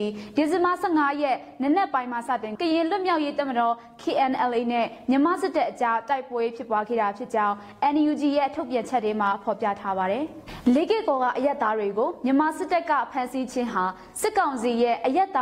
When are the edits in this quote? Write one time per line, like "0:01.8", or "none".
0:02.5